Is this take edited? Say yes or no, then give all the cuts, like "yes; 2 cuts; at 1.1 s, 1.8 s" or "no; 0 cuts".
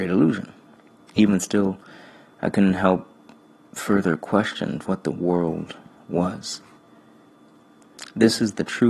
yes; 2 cuts; at 1.1 s, 4.8 s